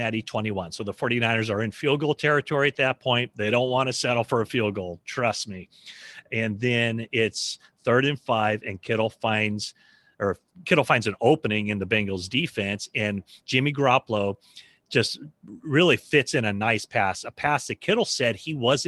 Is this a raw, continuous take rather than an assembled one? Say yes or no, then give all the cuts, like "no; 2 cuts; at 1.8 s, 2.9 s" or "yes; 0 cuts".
yes; 0 cuts